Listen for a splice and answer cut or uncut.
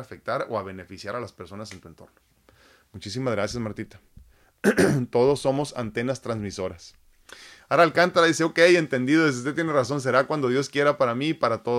uncut